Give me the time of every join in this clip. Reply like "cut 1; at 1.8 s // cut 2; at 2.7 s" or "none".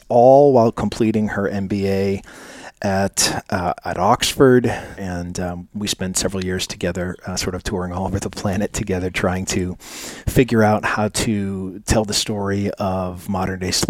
cut 1; at 5.0 s